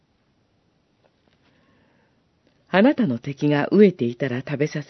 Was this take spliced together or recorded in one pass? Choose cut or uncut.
uncut